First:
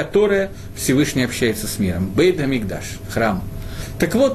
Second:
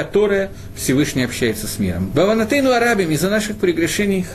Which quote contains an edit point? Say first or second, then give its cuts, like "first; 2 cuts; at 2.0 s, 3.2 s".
second; 1 cut; at 2.1 s